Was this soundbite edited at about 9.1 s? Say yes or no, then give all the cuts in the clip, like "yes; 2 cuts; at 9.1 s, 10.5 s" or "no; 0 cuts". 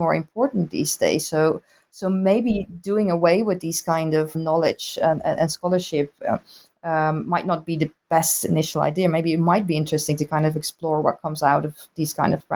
no; 1 cut; at 4.3 s